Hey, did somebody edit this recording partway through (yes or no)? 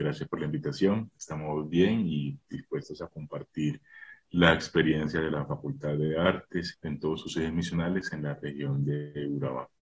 yes